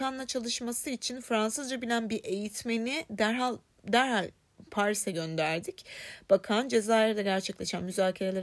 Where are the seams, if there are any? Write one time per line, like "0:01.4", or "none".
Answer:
none